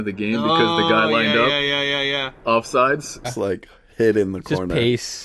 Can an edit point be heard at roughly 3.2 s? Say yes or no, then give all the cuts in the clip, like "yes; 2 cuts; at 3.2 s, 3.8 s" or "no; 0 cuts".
yes; 1 cut; at 3.2 s